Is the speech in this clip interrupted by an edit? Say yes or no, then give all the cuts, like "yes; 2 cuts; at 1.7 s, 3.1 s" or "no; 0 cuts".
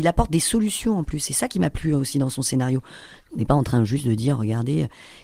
no; 0 cuts